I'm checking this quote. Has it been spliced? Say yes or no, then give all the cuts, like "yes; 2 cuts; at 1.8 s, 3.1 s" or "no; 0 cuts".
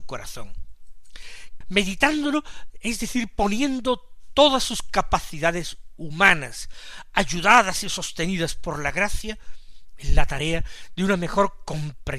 yes; 1 cut; at 1.6 s